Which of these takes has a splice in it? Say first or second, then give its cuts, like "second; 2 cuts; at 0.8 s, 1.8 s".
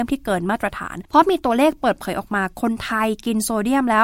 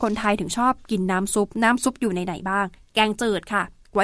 first; 1 cut; at 1.1 s